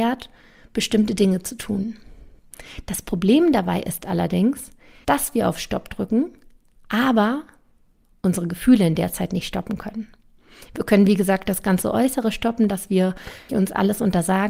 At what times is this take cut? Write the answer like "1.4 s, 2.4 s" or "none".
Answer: 13.5 s